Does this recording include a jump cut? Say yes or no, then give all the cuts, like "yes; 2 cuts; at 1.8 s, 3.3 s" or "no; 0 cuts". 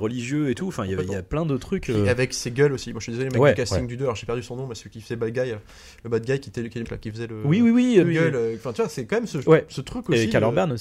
yes; 2 cuts; at 6.8 s, 8.0 s